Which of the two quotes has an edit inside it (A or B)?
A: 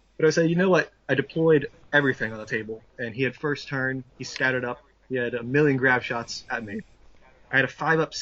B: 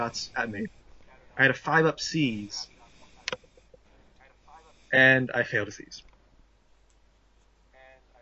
A